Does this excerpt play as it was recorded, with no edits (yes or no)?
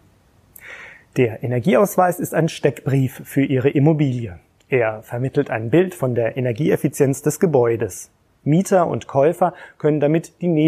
yes